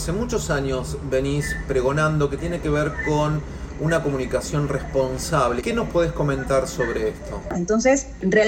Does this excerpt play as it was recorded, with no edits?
no; 2 cuts; at 5.6 s, 7.5 s

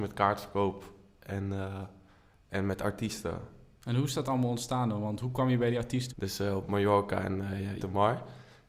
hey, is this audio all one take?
no; 2 cuts; at 6.1 s, 7.8 s

